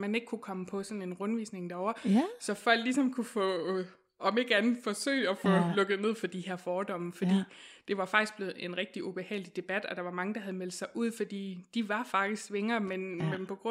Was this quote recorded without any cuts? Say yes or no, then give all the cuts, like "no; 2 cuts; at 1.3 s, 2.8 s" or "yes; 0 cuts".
yes; 0 cuts